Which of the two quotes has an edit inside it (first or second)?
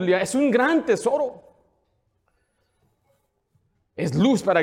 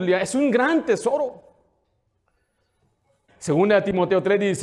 second